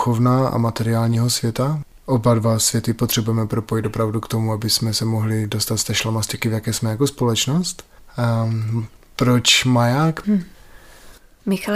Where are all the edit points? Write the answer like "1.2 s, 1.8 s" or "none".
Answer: 8.0 s, 10.2 s